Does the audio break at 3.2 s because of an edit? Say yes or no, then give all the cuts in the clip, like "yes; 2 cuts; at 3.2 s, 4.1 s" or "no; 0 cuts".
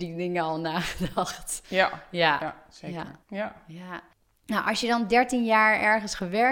yes; 1 cut; at 3.2 s